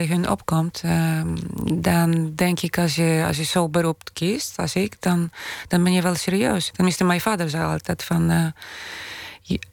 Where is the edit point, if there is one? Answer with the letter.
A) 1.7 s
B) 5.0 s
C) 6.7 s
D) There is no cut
C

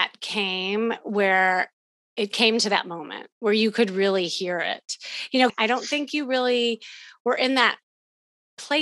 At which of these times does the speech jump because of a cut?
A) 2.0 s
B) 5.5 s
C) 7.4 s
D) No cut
B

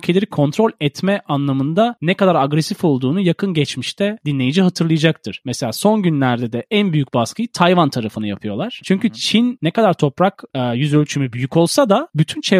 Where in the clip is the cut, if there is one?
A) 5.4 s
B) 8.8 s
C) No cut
B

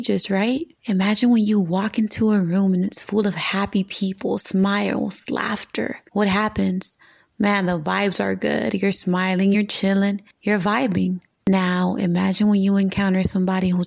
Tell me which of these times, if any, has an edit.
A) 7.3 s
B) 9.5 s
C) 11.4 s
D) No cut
B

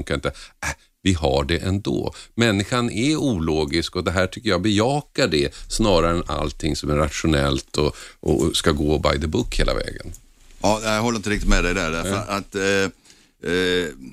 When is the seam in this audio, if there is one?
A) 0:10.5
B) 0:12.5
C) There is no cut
C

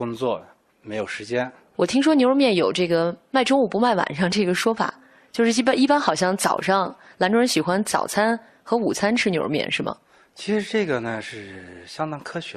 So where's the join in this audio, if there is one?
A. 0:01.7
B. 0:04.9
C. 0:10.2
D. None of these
A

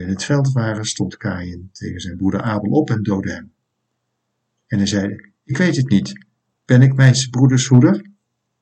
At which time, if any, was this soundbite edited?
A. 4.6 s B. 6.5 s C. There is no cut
A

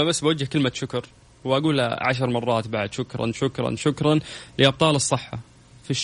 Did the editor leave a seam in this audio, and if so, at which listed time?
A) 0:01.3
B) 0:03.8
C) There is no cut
B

